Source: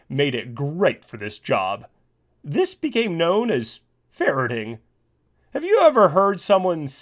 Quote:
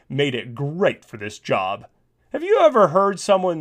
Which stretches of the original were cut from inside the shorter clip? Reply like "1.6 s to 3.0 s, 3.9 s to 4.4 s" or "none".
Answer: 2.2 s to 5.4 s